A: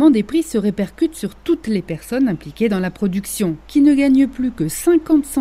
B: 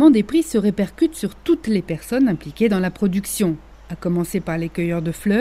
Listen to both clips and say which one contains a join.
A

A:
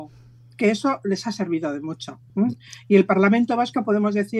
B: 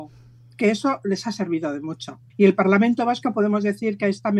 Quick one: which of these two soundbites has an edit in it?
B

